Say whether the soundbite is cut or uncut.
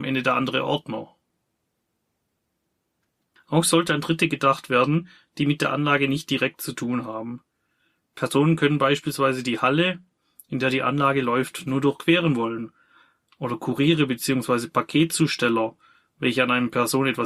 uncut